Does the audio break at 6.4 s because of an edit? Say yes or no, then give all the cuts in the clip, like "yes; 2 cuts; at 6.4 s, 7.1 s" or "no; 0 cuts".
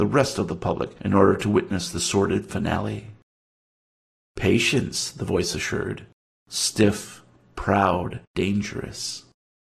yes; 2 cuts; at 6.4 s, 8.2 s